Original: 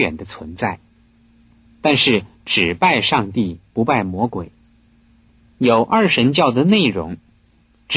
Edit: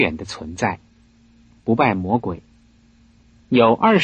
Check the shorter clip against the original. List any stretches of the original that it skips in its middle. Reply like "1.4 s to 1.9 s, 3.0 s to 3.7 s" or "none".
1.6 s to 3.7 s